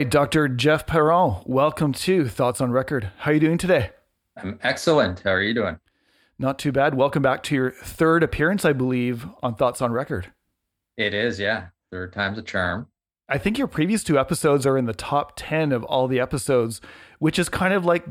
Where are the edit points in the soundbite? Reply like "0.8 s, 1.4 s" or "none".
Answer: none